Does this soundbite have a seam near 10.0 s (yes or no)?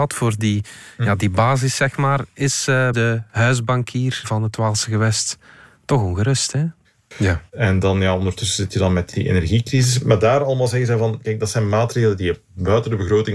no